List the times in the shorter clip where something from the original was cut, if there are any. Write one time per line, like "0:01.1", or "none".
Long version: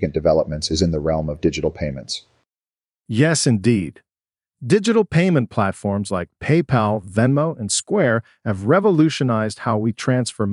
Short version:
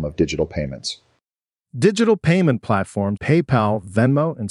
0:01.6
0:03.2